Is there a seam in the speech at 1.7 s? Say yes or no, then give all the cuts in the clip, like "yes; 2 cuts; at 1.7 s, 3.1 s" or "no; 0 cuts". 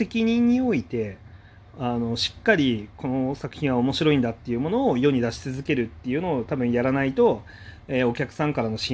no; 0 cuts